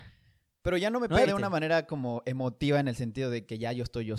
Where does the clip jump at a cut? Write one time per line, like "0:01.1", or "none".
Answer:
0:01.3